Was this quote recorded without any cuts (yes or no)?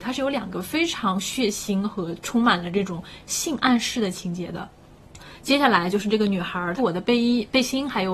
no